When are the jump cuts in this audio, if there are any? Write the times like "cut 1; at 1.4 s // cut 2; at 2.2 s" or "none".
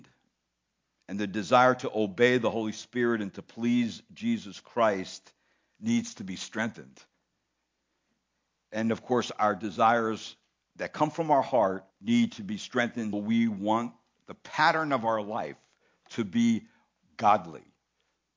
cut 1; at 11.9 s // cut 2; at 13.1 s

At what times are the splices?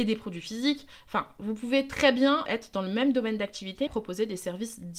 cut 1; at 2.5 s // cut 2; at 3.9 s

